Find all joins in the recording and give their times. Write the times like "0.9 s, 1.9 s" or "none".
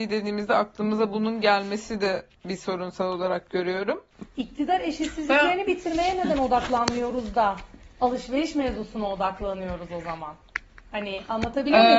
4.3 s